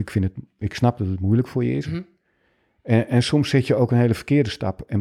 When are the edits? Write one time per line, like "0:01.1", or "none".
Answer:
0:01.8